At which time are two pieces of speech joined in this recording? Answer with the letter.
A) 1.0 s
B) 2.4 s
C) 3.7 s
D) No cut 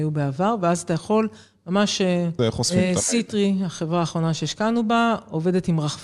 B